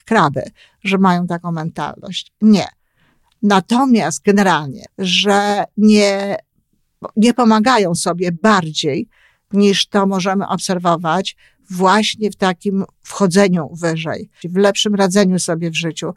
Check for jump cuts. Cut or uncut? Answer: cut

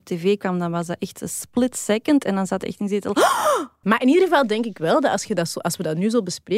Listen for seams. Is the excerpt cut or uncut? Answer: cut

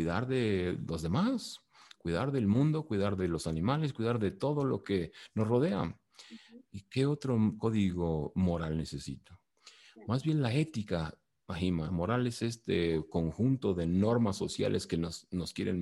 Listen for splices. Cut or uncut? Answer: cut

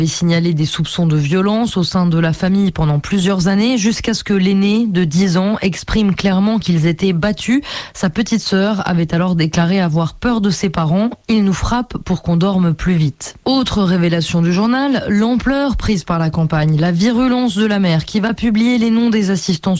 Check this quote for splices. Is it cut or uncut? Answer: uncut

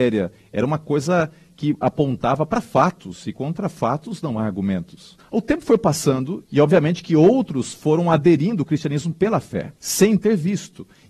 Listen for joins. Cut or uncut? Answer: cut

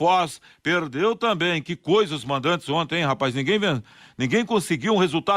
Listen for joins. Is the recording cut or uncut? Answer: uncut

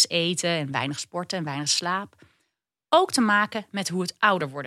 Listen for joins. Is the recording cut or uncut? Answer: uncut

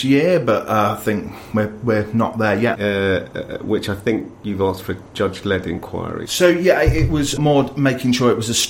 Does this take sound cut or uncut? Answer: cut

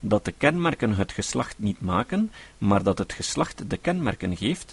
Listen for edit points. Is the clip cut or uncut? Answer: uncut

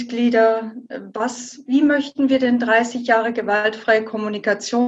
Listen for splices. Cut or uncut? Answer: uncut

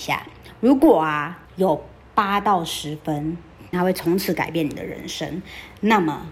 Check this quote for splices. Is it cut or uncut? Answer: cut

